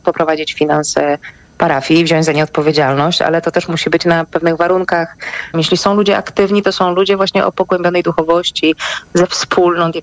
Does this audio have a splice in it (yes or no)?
yes